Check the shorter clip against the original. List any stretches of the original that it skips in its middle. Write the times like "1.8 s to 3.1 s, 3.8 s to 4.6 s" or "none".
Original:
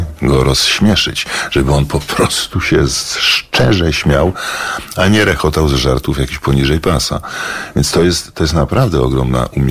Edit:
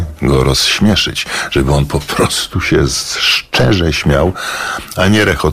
none

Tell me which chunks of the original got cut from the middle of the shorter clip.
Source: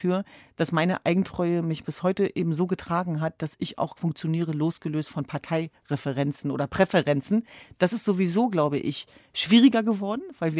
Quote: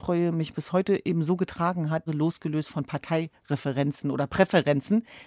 3.4 s to 4.5 s

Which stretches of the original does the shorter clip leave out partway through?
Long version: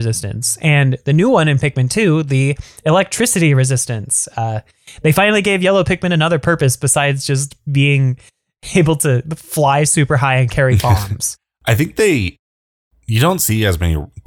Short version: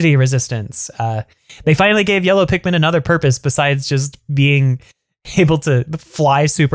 none

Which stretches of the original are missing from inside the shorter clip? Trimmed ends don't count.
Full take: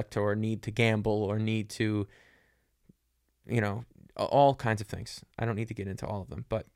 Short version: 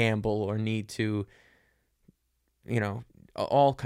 none

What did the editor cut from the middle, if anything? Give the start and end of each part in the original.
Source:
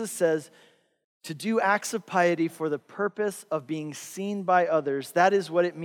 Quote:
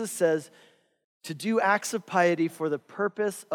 none

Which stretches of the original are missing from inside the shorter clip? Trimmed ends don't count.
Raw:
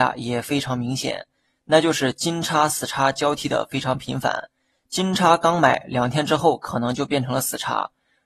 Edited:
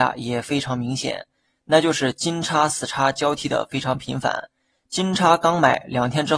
none

